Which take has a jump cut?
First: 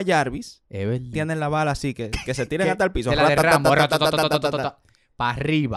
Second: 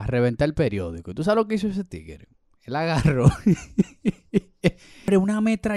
first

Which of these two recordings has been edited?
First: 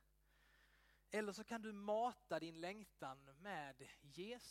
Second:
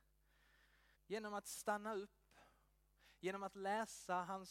second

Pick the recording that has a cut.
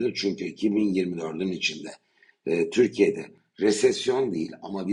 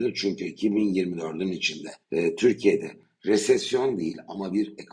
second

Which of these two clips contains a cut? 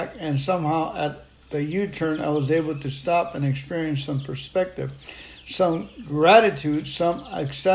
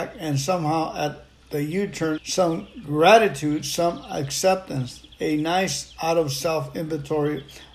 second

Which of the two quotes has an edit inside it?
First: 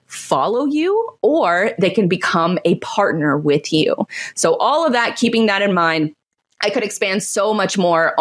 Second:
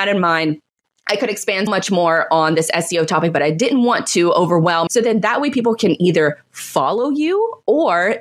second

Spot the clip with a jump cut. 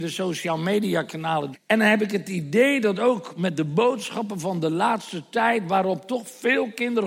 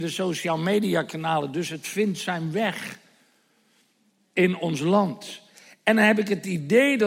first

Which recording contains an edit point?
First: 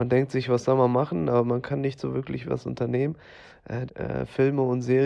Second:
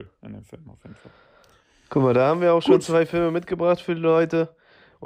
first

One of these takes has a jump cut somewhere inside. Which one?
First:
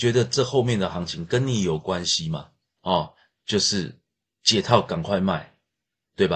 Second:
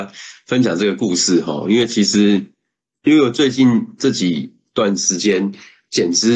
first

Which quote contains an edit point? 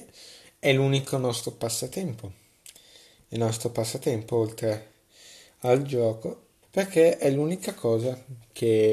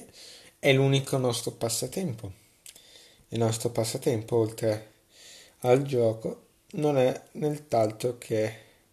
first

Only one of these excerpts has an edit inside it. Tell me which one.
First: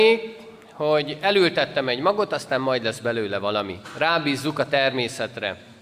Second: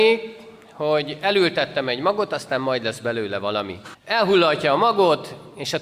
second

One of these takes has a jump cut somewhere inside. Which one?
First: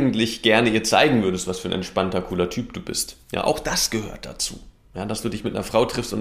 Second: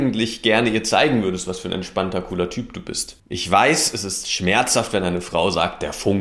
second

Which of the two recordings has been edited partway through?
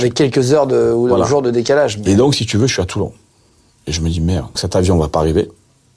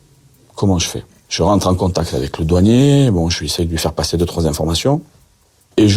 first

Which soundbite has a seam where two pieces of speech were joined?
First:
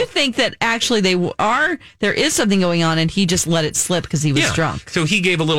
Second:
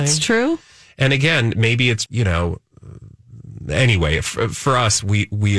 second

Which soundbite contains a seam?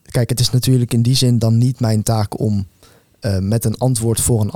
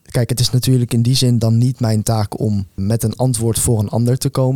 second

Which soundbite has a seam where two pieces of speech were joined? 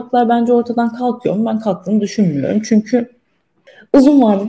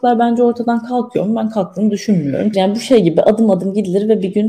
second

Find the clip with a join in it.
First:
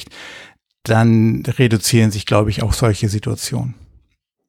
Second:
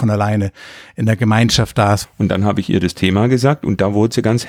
second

